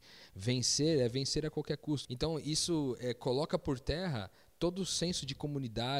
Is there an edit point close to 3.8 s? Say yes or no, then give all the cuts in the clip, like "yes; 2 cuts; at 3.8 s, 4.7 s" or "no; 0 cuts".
no; 1 cut; at 2.0 s